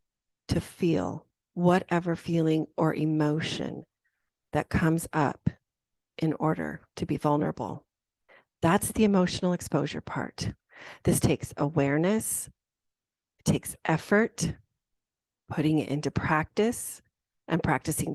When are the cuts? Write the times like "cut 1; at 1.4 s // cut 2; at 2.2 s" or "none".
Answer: none